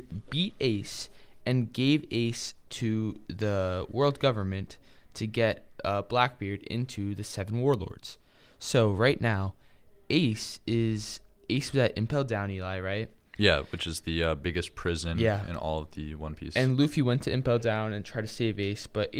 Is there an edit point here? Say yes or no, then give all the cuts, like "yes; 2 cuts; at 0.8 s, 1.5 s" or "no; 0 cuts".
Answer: no; 0 cuts